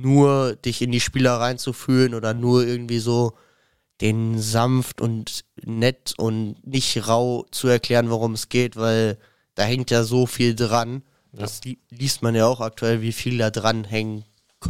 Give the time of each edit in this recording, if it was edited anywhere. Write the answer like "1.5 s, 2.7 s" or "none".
none